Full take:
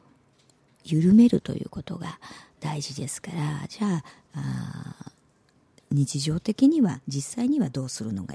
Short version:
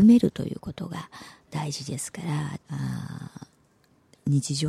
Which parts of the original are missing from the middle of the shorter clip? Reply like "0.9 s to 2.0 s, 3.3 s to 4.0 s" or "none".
3.7 s to 4.2 s